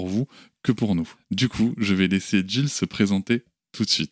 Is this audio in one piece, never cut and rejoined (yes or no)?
yes